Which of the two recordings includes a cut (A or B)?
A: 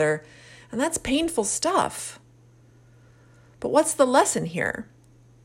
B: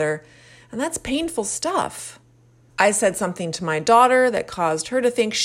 B